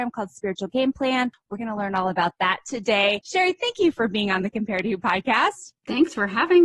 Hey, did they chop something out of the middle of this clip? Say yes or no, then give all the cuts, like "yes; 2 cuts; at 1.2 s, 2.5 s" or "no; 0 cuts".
no; 0 cuts